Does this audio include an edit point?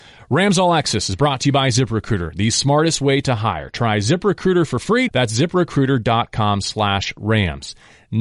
yes; 1 cut; at 5.1 s

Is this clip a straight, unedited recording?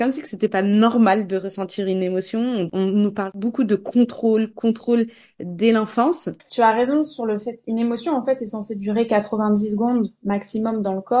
no; 2 cuts; at 4.5 s, 6.4 s

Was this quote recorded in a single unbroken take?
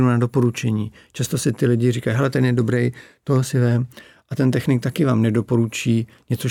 yes; 0 cuts

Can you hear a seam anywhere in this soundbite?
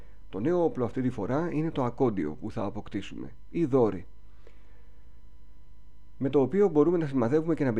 no; 0 cuts

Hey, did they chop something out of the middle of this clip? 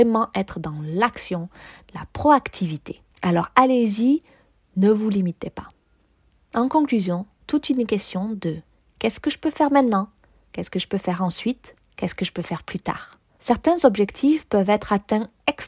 yes; 2 cuts; at 3.1 s, 13.3 s

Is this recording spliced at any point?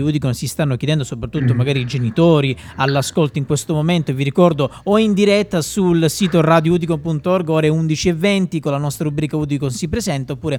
no; 0 cuts

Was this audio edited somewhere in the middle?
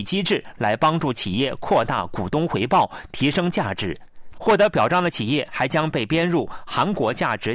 yes; 1 cut; at 4.3 s

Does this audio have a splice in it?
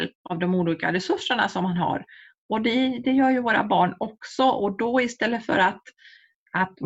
no; 0 cuts

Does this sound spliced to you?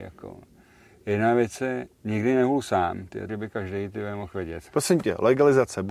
yes; 2 cuts; at 3.3 s, 4.7 s

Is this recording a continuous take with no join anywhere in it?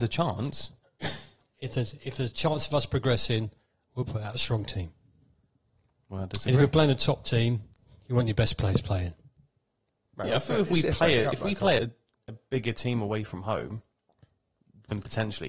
no; 1 cut; at 11.8 s

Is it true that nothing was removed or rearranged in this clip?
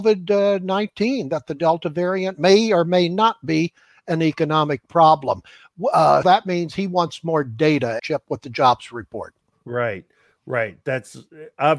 no; 2 cuts; at 6.2 s, 8.0 s

